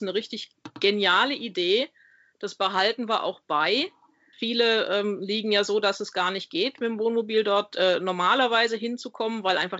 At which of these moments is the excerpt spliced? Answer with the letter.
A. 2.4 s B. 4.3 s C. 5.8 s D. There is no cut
B